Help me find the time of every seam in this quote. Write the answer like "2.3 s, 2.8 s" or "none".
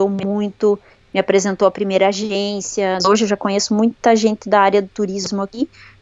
3.0 s